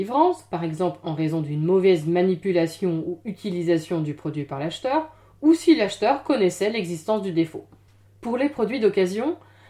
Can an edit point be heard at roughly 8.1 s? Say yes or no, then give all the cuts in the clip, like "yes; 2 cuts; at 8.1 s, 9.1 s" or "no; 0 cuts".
yes; 1 cut; at 8.1 s